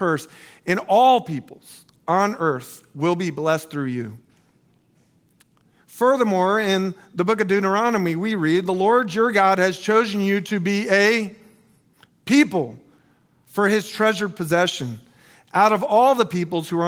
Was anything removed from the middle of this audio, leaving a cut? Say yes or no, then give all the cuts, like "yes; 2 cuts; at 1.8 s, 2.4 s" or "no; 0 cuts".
no; 0 cuts